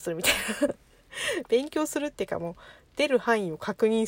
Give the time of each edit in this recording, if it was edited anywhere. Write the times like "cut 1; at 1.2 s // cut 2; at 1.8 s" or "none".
none